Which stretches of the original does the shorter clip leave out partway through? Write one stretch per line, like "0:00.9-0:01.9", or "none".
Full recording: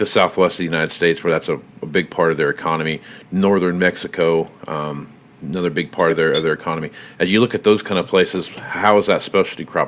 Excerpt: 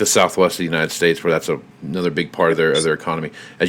0:01.7-0:05.3